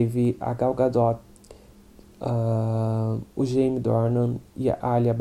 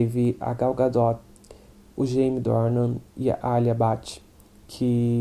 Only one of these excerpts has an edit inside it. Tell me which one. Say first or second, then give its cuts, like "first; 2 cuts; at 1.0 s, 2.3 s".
second; 1 cut; at 1.9 s